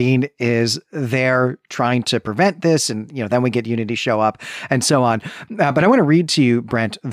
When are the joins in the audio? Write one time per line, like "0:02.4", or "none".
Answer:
none